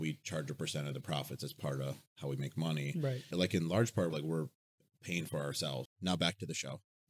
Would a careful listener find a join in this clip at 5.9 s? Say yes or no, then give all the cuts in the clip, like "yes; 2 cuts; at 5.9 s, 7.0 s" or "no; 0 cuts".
yes; 2 cuts; at 4.1 s, 5.9 s